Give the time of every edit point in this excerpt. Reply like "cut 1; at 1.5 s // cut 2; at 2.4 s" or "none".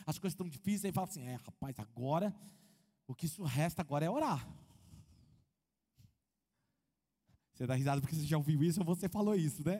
none